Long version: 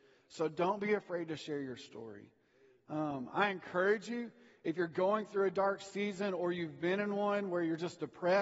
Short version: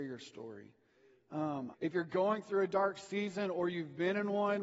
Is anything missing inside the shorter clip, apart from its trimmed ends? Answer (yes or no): yes